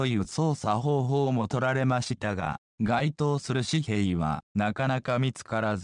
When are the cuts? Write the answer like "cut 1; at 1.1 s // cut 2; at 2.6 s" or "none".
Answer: cut 1; at 2.7 s